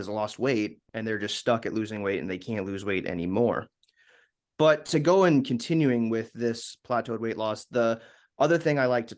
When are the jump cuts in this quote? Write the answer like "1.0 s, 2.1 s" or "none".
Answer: none